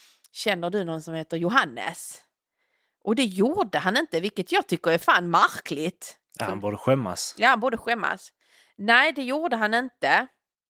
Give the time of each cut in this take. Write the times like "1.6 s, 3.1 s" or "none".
none